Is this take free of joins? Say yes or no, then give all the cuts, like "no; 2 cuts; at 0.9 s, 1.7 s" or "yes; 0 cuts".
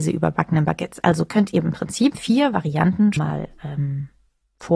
no; 2 cuts; at 2.1 s, 3.2 s